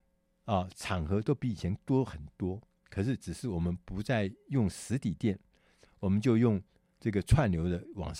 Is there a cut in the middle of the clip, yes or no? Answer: no